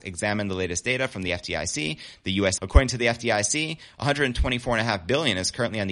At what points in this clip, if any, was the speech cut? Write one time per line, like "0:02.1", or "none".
0:02.6